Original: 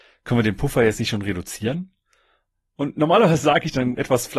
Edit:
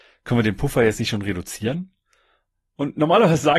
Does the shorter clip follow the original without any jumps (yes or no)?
yes